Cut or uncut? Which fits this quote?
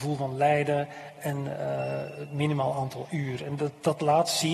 uncut